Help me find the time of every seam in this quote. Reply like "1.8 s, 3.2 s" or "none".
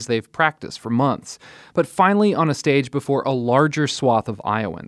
none